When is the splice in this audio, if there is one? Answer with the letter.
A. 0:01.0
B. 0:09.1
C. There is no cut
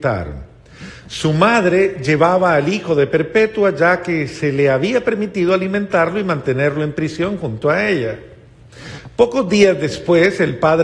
C